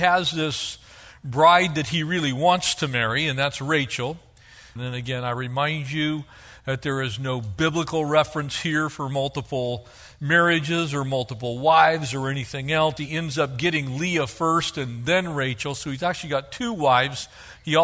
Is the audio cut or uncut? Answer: cut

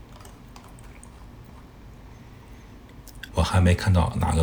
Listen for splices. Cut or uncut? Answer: cut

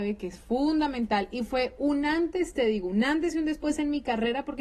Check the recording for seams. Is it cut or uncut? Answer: uncut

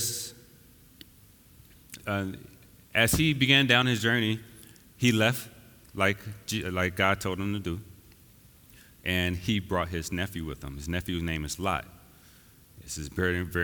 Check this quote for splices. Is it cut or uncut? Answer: cut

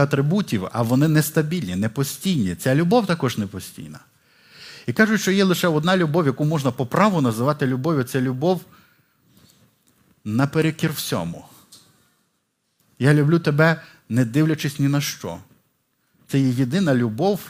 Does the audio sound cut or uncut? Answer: uncut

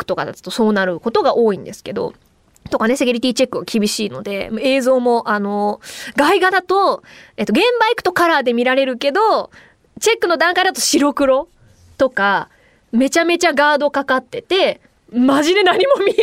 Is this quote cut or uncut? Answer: uncut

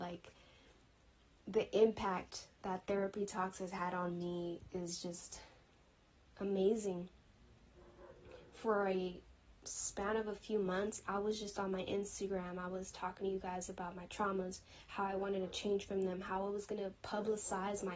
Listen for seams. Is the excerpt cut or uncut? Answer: uncut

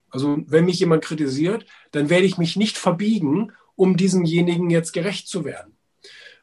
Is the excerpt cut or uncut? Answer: uncut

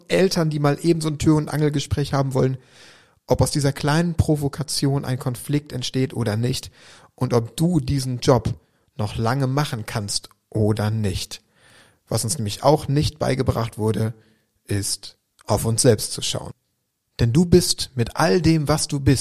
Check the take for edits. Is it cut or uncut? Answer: uncut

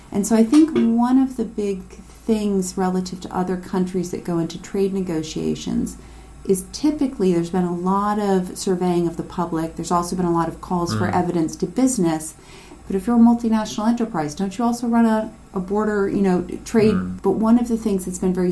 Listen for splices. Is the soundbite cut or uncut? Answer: cut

